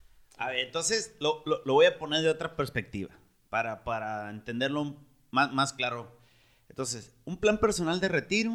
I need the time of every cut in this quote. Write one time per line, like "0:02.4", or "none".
0:01.6